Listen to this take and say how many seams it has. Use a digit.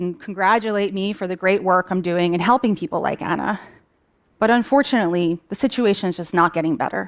1